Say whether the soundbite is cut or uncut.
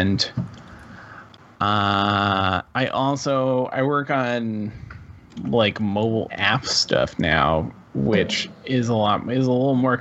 cut